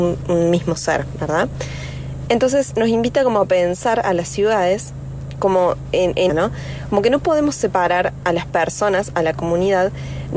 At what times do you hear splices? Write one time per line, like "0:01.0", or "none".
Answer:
0:06.3